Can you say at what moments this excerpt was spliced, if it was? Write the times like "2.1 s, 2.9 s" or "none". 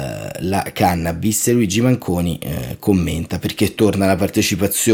none